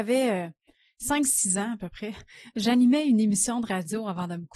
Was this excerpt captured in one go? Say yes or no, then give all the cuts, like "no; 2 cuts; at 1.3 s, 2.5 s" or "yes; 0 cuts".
yes; 0 cuts